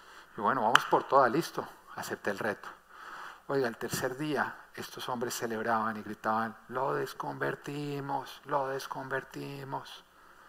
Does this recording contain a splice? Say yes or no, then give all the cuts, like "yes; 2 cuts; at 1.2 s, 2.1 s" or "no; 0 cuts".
no; 0 cuts